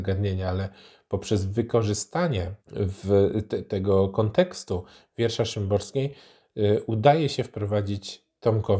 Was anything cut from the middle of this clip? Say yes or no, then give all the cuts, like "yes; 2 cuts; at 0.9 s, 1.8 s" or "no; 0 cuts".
yes; 1 cut; at 2.6 s